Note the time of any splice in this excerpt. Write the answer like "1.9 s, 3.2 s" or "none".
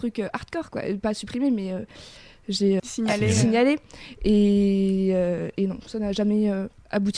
2.8 s